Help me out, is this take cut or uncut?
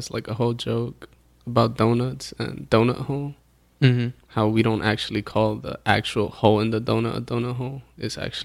uncut